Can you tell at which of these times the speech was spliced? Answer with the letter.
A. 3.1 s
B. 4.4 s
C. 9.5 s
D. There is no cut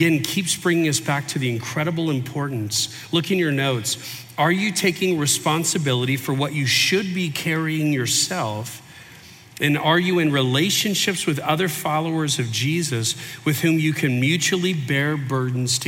D